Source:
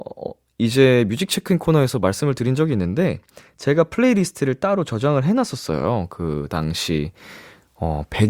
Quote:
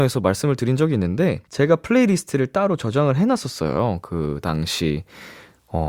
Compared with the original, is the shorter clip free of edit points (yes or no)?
no